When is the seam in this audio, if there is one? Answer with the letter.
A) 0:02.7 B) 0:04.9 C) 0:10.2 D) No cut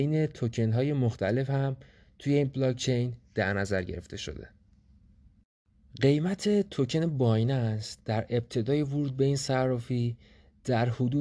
D